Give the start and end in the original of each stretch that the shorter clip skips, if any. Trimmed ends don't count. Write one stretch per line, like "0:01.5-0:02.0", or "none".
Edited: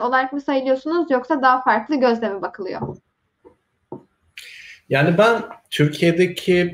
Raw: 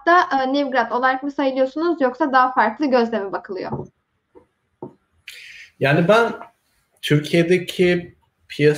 0:06.5-0:07.0